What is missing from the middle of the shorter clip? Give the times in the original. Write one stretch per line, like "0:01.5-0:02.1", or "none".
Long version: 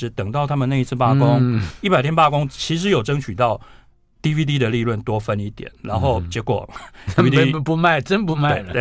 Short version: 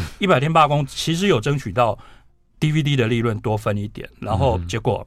none